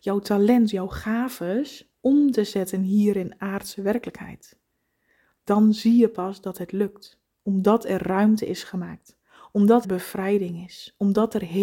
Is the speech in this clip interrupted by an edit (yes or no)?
yes